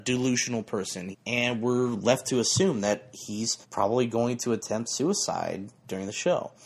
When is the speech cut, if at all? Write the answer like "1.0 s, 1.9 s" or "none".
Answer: 1.1 s, 3.6 s